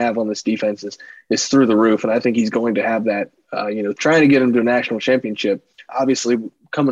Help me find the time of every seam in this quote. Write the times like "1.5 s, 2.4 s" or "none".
3.9 s, 5.9 s